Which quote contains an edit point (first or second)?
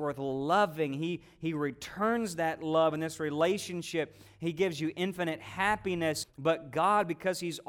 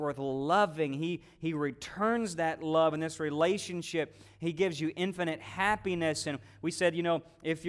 first